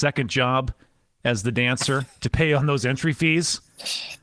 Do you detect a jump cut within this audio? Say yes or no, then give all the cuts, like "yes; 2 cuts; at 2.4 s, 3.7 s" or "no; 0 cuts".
no; 0 cuts